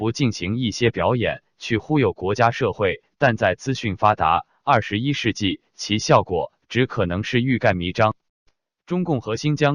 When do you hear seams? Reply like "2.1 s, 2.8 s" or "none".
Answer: none